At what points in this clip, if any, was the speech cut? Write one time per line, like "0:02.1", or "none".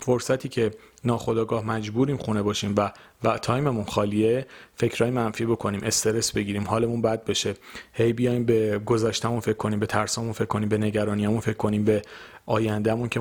none